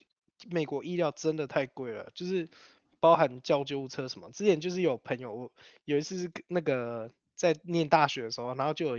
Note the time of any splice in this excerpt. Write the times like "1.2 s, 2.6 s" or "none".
none